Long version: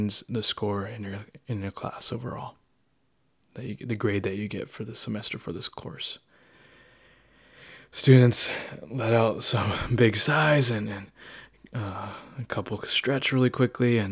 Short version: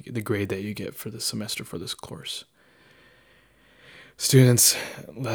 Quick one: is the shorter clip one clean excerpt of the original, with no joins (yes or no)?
yes